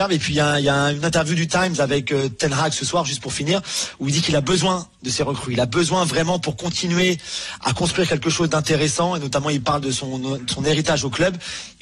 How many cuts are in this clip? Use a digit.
0